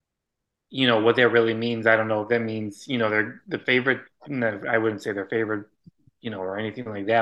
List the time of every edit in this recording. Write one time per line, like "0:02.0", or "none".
none